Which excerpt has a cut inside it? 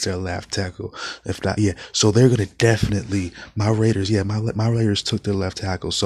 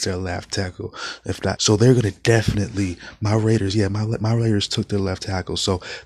second; 1 cut; at 1.6 s

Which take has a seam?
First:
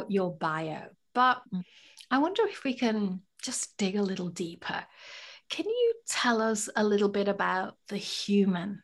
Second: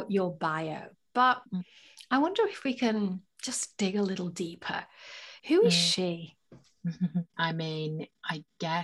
second; 2 cuts; at 5.4 s, 7.3 s

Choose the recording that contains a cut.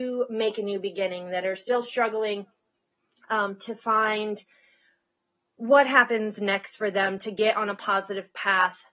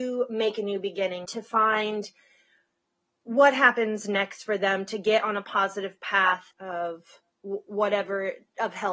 second; 2 cuts; at 1.2 s, 6.5 s

